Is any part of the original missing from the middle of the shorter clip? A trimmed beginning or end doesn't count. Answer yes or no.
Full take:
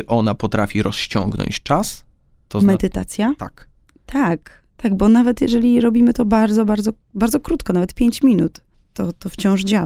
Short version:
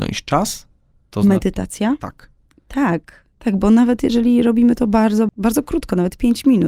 yes